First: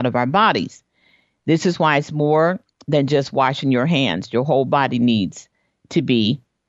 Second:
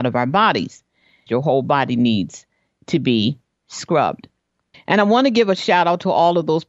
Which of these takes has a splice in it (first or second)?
second